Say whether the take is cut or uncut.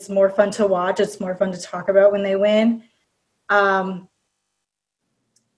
uncut